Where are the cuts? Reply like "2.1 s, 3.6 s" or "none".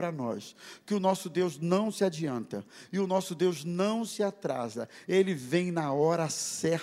none